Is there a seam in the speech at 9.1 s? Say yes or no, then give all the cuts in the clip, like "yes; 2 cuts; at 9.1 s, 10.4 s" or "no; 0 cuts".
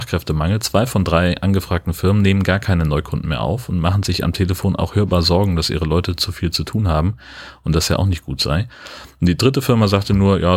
no; 0 cuts